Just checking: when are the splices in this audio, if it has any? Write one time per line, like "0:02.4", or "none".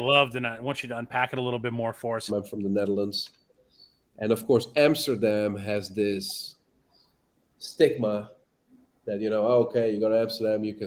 0:02.3